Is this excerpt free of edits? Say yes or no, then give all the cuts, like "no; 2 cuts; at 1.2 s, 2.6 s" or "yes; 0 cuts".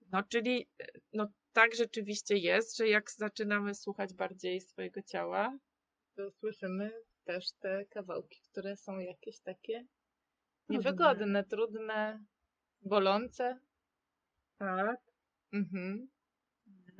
yes; 0 cuts